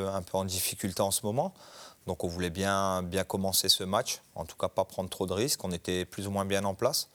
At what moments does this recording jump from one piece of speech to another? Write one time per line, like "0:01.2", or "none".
none